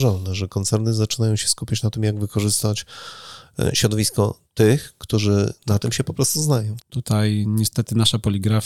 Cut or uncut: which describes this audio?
cut